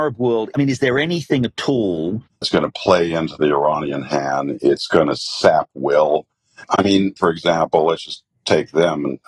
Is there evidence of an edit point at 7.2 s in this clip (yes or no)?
yes